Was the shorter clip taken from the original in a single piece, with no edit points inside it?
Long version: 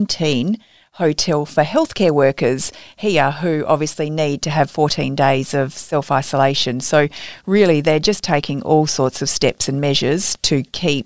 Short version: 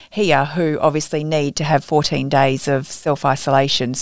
yes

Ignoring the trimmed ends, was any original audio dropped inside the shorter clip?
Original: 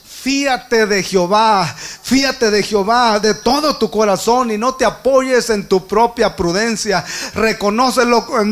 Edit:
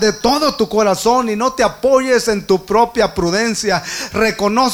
no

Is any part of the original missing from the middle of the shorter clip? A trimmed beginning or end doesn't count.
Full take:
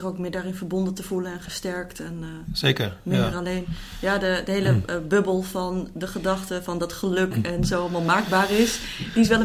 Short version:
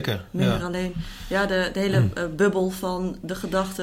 no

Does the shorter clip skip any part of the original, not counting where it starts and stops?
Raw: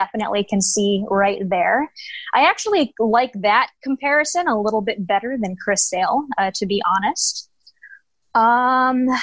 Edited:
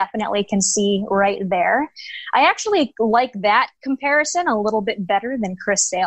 no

